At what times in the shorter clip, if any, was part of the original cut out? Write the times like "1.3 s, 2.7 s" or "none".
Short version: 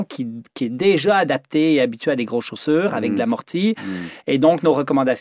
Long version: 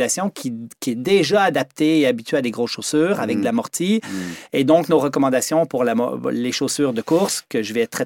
none